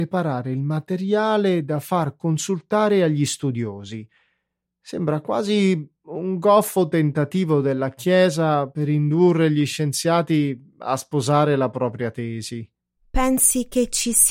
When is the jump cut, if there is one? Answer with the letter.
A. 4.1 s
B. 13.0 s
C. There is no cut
B